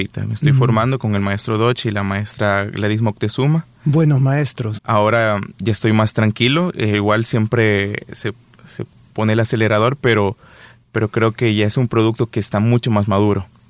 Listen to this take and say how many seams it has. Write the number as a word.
one